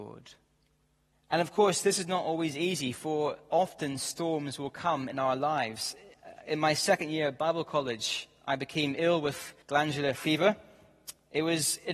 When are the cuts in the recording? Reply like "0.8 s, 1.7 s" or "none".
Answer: 1.1 s, 9.6 s